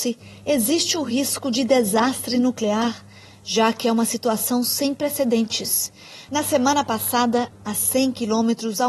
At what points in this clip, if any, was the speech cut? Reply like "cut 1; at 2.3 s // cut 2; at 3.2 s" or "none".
cut 1; at 6.3 s // cut 2; at 7.5 s